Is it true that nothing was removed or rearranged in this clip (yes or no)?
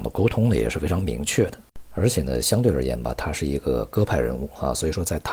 yes